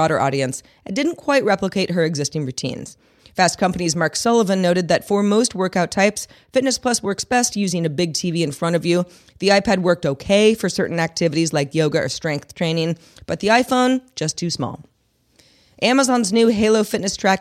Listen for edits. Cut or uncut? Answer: uncut